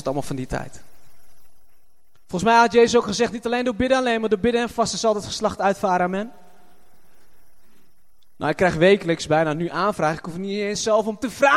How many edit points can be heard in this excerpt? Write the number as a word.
zero